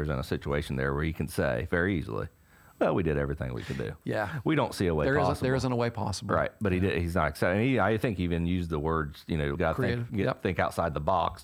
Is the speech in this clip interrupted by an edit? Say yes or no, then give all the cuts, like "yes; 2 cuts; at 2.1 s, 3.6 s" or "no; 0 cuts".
yes; 1 cut; at 9.5 s